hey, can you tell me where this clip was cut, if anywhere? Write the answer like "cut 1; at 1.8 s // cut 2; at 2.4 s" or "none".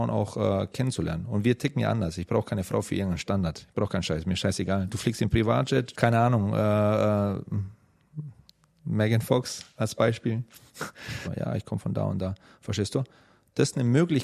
cut 1; at 5.9 s // cut 2; at 11.2 s